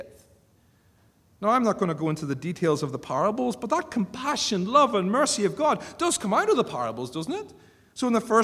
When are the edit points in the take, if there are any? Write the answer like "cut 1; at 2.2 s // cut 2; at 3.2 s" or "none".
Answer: none